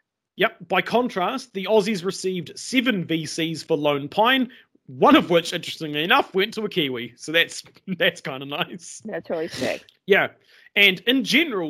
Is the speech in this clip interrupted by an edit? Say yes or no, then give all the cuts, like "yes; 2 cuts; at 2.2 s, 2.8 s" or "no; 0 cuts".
yes; 1 cut; at 9.9 s